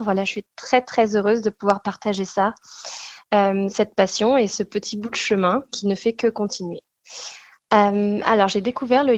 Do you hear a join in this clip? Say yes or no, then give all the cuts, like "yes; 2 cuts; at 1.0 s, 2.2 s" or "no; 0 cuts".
no; 0 cuts